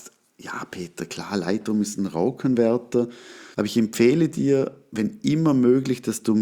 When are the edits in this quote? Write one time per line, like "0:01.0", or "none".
0:03.5